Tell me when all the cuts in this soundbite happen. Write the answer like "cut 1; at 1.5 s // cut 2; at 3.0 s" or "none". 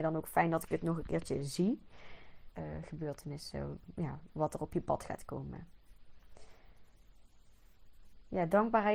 cut 1; at 2.5 s